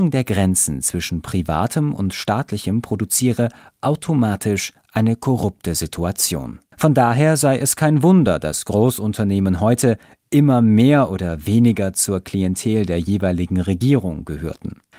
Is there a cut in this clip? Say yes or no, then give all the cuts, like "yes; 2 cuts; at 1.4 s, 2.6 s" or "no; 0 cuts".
yes; 1 cut; at 6.7 s